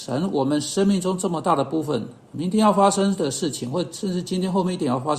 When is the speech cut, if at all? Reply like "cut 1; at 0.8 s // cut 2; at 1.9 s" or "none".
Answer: none